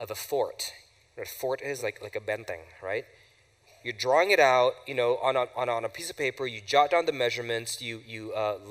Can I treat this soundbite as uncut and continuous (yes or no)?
yes